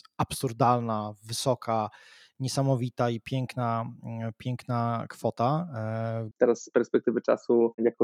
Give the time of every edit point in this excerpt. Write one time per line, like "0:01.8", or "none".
0:06.3

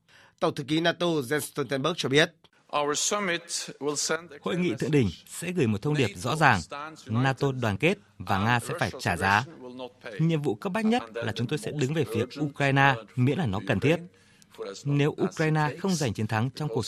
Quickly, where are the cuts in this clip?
0:13.1

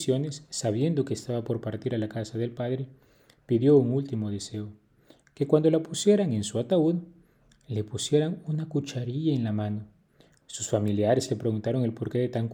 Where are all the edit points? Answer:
none

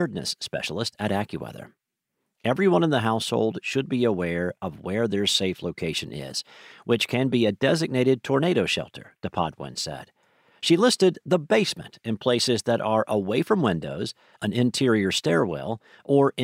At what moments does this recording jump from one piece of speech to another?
none

